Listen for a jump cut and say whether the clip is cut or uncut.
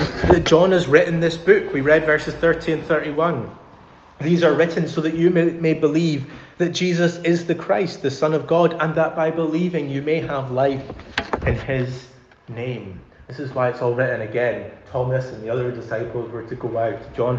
uncut